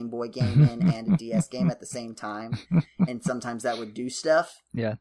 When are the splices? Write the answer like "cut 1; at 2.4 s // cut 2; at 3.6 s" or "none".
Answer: none